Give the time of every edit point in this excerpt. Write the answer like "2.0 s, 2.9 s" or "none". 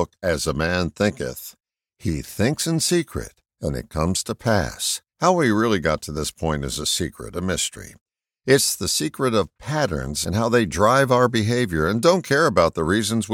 5.1 s